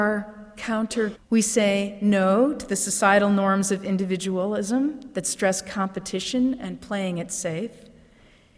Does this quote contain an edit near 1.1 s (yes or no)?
yes